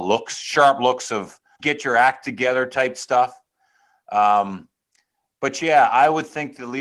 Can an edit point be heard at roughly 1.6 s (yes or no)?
yes